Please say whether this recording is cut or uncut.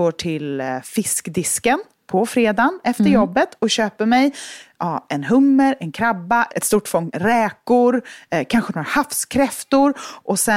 uncut